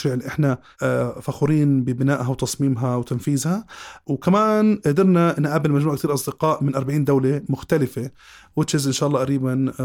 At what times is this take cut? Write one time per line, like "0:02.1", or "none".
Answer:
none